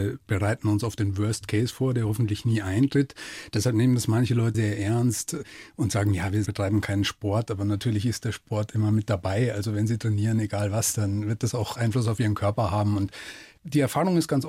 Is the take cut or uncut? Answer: cut